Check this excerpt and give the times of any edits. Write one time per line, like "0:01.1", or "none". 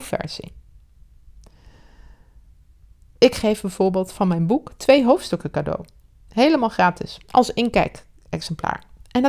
none